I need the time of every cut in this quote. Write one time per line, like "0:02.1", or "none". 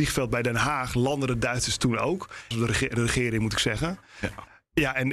0:02.5